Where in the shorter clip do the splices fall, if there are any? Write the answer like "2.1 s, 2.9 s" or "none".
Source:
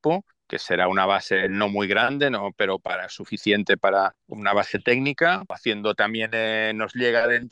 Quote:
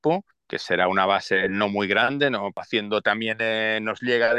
2.5 s